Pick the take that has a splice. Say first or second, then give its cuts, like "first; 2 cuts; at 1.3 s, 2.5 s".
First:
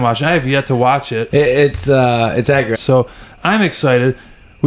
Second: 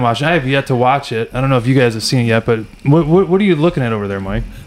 first; 2 cuts; at 1.3 s, 2.7 s